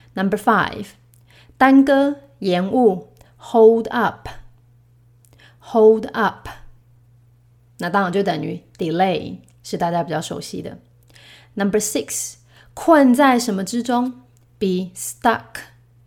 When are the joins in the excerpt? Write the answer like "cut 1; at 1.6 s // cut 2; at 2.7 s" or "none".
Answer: none